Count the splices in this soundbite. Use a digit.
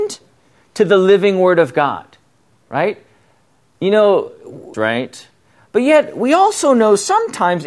1